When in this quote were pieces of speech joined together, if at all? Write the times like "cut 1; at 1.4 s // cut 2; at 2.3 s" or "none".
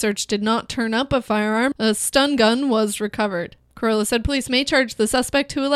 cut 1; at 1.7 s